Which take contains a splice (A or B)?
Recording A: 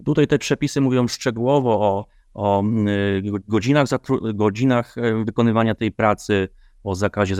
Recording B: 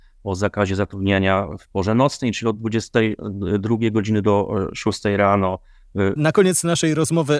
B